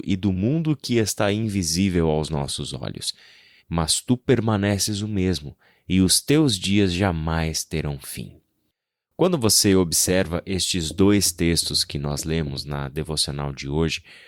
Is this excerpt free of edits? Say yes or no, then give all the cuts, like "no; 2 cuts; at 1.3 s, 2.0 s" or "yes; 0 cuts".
no; 1 cut; at 3.6 s